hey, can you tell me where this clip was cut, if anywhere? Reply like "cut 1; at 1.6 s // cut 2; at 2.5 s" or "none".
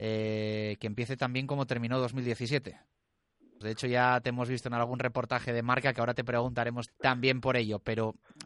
cut 1; at 3.6 s // cut 2; at 6.9 s